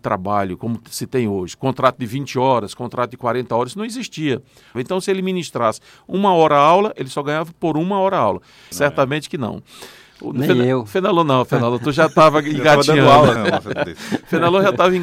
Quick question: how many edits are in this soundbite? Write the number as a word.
three